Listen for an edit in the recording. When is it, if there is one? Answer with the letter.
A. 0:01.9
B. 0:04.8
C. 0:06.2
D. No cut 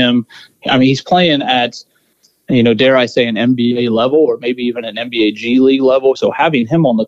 C